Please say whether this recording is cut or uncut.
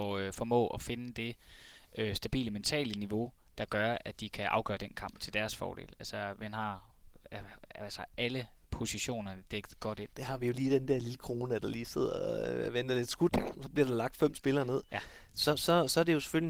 cut